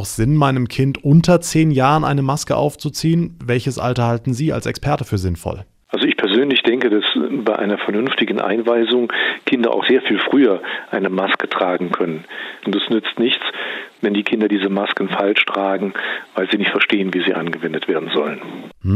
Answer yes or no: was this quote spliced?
yes